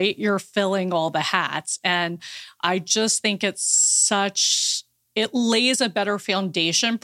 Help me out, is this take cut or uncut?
uncut